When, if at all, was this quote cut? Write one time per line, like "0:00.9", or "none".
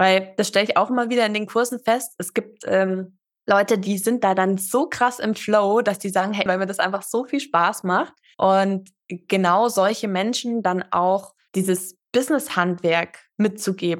0:06.5